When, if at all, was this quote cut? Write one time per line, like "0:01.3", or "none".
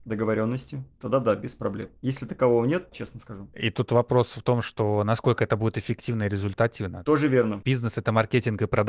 0:00.9
0:02.9

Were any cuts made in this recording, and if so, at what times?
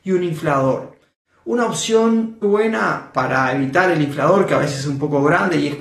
0:02.4

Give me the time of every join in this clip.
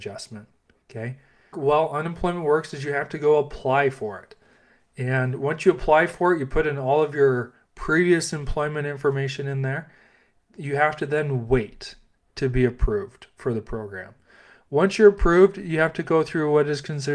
0:01.5

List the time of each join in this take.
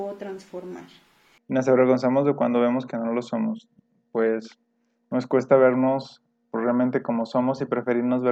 0:01.4

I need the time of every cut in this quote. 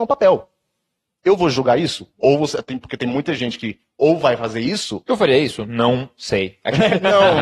0:02.1

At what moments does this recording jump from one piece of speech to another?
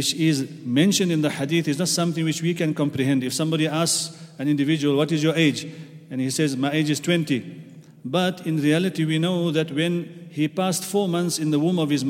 none

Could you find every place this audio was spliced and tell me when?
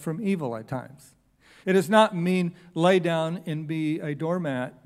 0:01.6

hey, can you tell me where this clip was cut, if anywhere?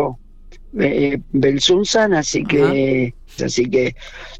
0:03.4

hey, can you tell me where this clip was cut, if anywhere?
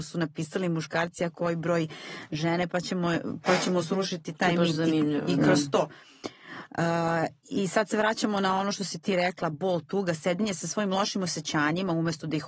none

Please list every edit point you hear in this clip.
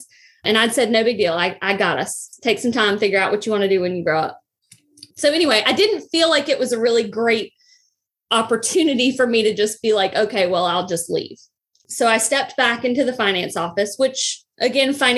none

